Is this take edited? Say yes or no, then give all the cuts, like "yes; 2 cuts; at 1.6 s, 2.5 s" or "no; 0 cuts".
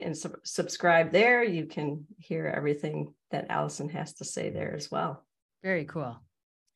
yes; 1 cut; at 5.5 s